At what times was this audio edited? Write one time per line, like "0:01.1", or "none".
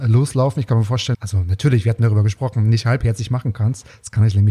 0:01.1